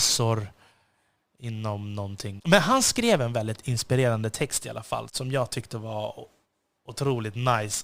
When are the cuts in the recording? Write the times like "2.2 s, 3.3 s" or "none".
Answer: 2.4 s, 5.1 s

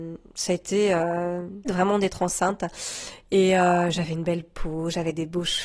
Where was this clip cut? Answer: 1.6 s

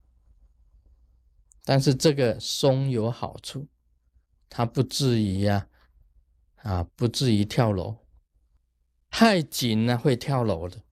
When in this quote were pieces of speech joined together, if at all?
none

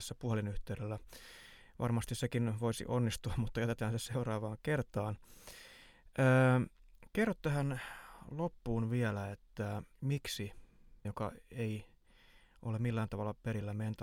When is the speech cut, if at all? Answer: 9.9 s, 11.0 s

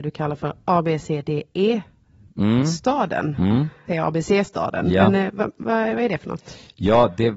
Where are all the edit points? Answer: 3.9 s

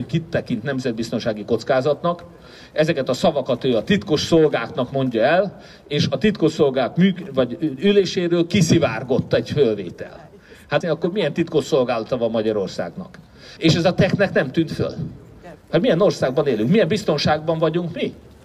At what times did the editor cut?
10.8 s, 13.6 s, 15.6 s

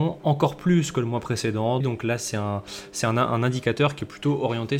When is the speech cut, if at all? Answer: 1.8 s

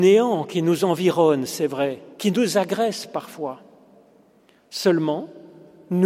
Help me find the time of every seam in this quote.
2.1 s

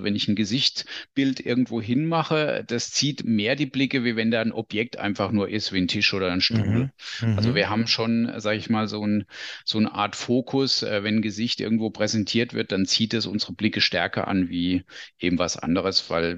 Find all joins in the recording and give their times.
none

